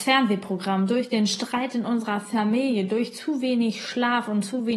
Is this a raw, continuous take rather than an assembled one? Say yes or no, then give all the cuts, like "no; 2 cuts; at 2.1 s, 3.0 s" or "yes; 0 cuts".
yes; 0 cuts